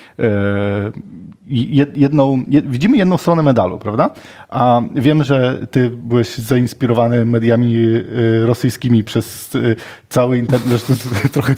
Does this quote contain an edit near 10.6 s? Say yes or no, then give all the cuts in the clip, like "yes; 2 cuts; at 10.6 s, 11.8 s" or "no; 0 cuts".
no; 0 cuts